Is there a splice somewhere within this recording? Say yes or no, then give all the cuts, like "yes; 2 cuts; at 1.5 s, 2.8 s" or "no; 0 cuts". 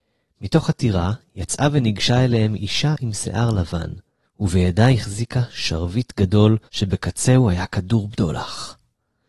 yes; 2 cuts; at 4.2 s, 6.7 s